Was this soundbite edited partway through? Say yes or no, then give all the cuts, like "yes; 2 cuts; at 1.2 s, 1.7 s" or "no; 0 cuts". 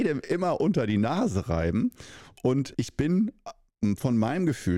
yes; 1 cut; at 2.7 s